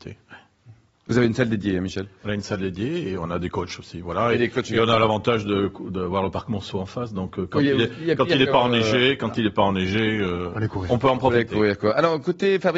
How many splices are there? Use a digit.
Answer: 0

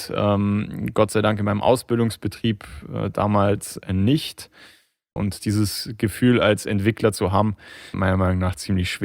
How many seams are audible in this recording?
2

